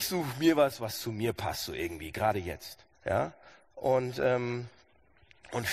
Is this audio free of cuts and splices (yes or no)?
no